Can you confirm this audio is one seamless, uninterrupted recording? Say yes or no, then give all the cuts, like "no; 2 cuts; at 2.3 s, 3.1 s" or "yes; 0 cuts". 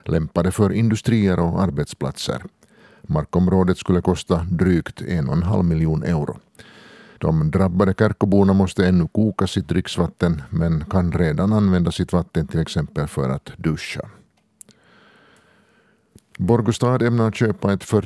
no; 1 cut; at 7.2 s